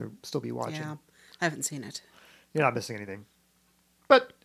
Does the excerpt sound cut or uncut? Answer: uncut